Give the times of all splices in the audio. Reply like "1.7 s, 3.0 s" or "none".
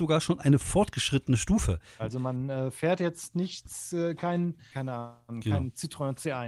2.0 s, 4.7 s